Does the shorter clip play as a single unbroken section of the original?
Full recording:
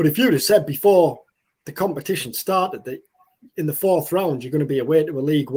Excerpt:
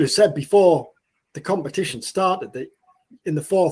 yes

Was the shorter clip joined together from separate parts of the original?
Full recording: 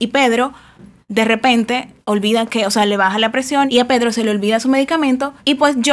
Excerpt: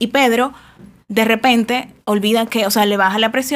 no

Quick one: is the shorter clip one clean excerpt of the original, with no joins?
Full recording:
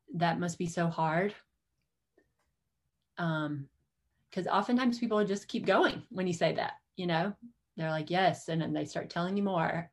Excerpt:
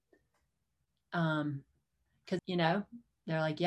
no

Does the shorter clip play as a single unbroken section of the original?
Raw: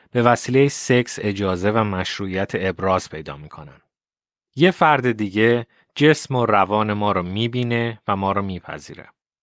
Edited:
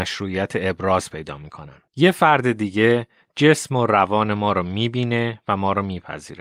no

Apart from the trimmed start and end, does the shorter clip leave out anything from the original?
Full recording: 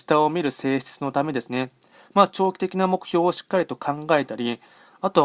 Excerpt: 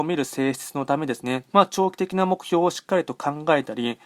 yes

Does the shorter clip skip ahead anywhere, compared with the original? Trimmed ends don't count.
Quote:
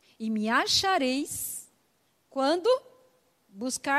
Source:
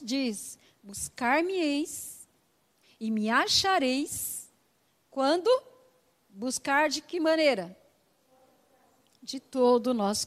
no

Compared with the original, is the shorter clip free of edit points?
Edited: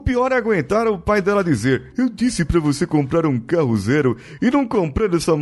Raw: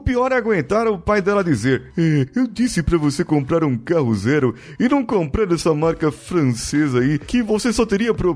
no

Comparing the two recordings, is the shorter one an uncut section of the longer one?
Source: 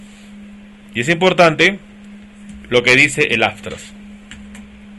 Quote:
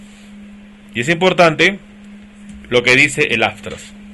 yes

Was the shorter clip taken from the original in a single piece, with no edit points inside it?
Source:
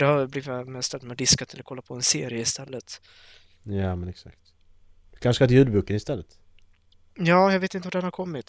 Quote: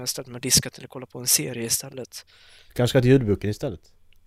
no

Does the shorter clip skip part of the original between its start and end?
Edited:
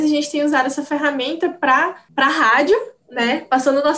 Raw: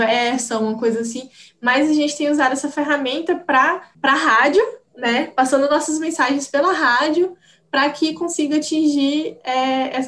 no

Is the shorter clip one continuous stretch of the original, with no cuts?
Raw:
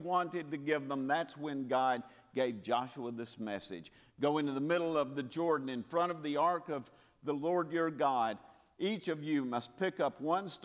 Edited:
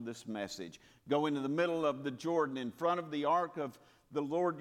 yes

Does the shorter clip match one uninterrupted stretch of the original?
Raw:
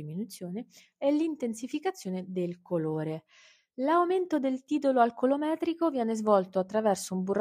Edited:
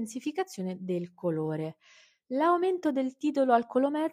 yes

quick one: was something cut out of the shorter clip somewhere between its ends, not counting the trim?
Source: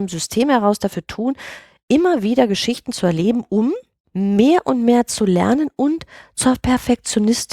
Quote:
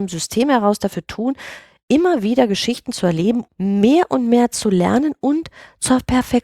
yes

